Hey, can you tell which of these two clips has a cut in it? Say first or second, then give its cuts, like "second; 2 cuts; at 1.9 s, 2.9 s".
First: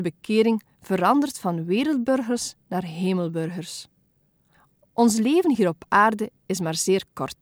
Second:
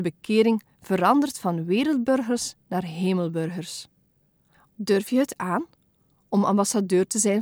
second; 1 cut; at 4.7 s